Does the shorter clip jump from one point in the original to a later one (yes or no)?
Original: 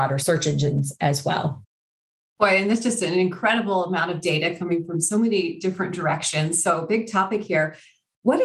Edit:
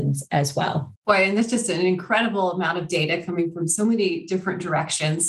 yes